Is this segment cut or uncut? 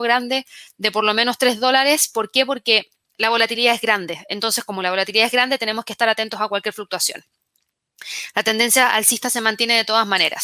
uncut